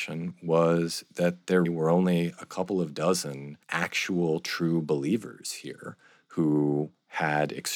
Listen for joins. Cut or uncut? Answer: cut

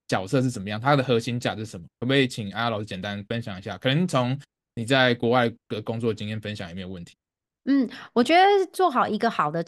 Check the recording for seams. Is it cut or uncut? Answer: uncut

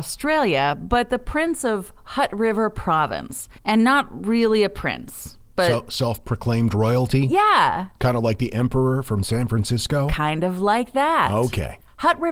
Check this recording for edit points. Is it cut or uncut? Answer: cut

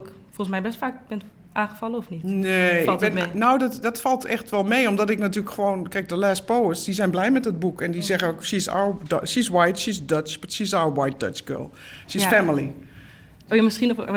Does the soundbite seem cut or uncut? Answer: uncut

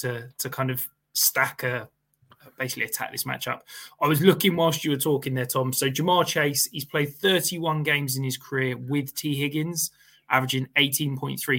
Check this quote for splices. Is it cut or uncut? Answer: uncut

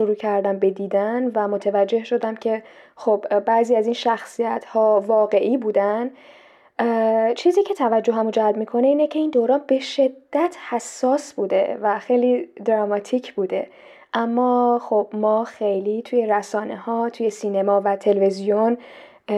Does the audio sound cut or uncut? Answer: uncut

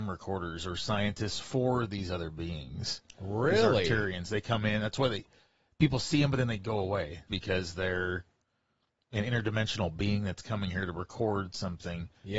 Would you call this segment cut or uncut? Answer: cut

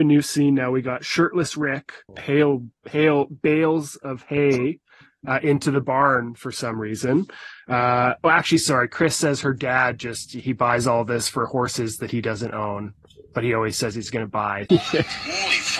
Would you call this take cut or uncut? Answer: cut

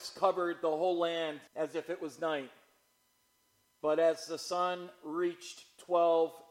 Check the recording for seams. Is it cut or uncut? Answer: cut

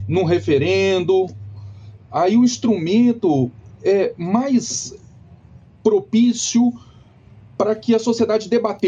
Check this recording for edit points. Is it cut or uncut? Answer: uncut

